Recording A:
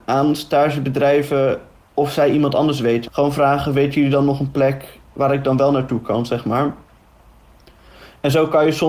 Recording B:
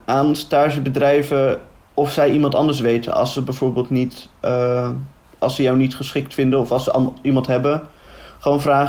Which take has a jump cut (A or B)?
A